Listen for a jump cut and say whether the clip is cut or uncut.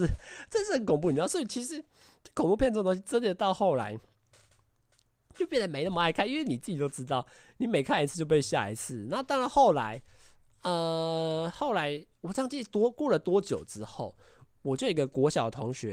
uncut